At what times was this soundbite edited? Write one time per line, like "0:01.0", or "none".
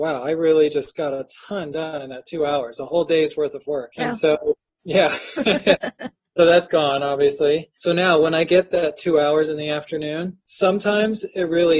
0:04.0